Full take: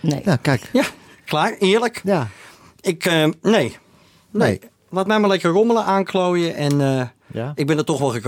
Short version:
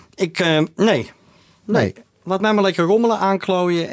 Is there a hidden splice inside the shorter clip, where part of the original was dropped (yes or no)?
no